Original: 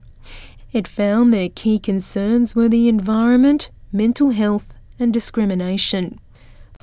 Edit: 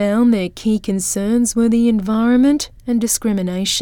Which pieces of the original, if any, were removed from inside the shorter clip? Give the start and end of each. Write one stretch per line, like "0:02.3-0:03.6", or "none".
0:03.8-0:04.9